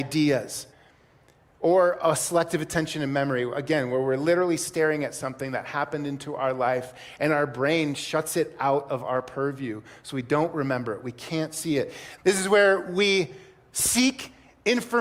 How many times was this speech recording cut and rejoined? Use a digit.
1